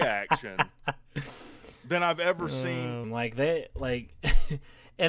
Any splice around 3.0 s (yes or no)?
yes